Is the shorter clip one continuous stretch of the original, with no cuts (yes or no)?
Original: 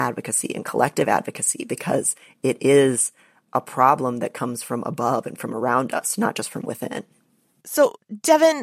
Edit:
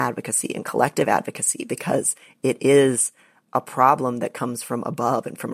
yes